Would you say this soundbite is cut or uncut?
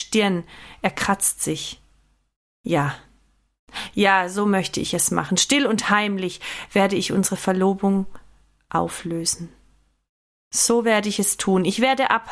uncut